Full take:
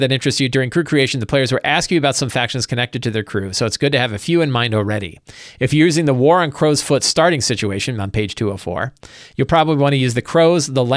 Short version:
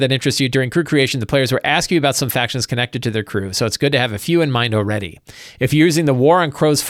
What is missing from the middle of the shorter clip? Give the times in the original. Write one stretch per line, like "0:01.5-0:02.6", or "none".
none